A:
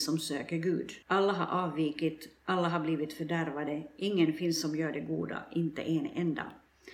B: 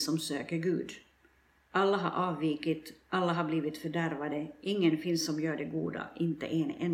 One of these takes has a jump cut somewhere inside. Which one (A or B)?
A